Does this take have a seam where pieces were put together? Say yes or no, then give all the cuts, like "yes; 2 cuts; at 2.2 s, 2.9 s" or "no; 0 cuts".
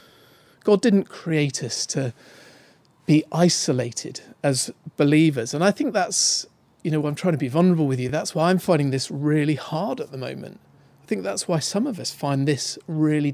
no; 0 cuts